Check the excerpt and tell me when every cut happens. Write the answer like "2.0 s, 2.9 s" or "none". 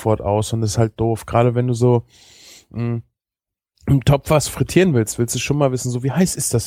none